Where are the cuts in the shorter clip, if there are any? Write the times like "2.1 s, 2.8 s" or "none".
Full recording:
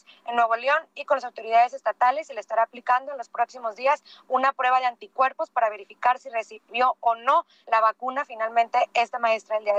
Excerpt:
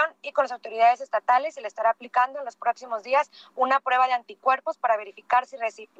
none